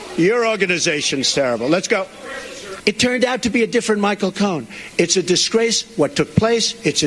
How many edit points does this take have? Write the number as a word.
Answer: one